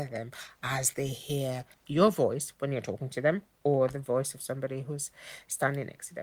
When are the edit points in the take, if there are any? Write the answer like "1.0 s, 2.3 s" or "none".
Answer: 1.7 s